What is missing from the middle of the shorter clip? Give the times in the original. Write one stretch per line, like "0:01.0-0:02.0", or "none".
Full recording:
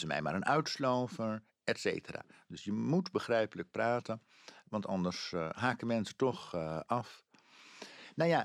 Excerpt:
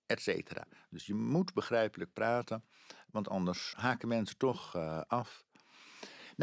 0:05.3-0:05.5